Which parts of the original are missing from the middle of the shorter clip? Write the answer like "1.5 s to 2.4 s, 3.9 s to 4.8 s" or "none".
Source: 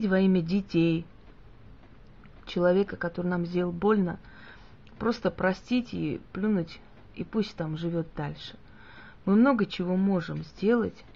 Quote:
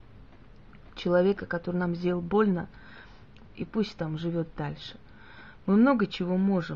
5.0 s to 7.0 s